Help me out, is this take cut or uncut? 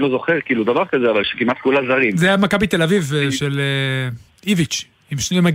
uncut